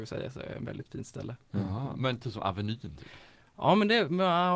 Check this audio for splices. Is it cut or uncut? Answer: uncut